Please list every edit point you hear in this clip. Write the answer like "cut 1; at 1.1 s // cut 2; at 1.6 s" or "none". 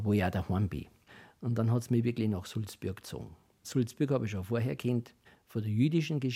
none